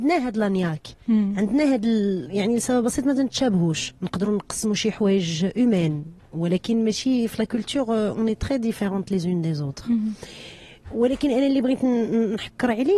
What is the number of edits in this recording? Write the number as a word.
two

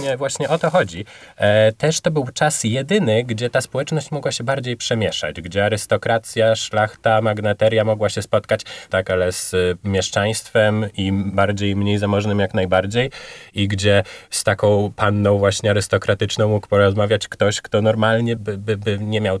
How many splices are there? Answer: two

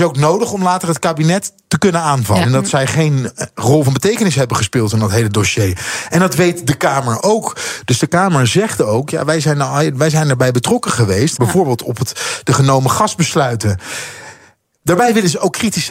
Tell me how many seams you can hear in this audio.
two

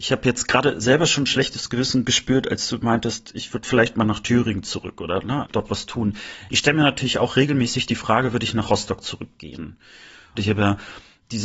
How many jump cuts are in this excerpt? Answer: two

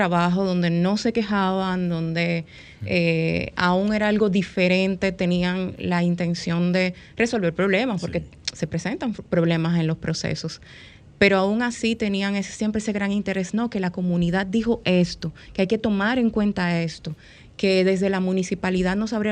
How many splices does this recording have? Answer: zero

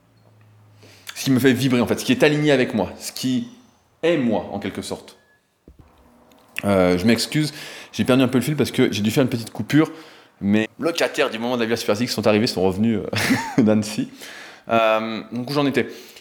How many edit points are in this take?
one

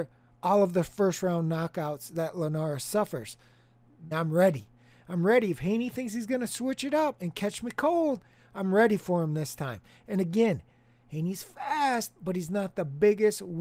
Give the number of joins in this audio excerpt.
one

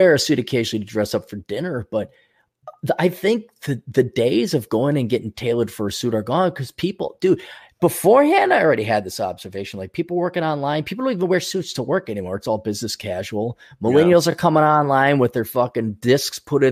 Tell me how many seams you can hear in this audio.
zero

